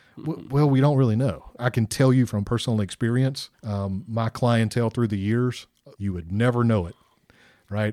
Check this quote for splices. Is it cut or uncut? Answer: cut